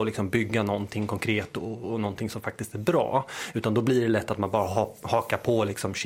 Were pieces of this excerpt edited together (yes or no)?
no